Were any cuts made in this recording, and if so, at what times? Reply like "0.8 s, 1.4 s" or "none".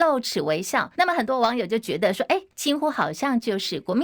1.0 s, 2.5 s